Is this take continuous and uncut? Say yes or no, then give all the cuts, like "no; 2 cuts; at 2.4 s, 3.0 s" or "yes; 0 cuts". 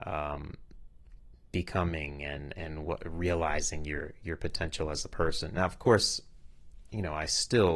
yes; 0 cuts